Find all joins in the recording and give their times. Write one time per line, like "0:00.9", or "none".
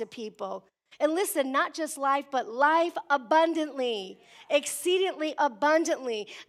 none